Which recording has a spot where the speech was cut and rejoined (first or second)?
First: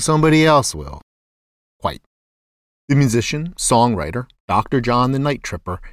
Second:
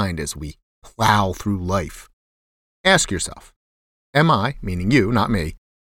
first